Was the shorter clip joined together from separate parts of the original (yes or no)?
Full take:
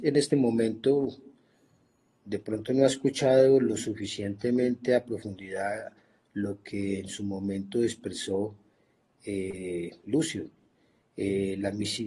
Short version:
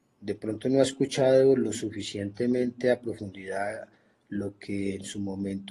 no